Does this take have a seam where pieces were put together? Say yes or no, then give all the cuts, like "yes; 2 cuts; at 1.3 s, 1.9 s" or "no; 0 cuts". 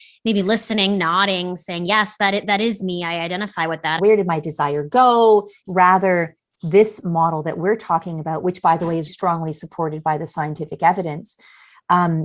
yes; 3 cuts; at 4.0 s, 5.6 s, 9.1 s